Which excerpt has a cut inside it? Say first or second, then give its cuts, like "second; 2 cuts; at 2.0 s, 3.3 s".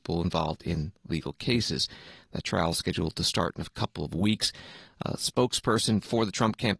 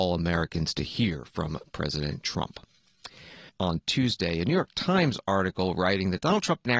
second; 1 cut; at 3.5 s